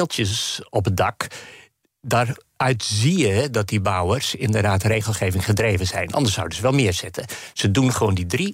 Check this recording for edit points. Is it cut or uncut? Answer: uncut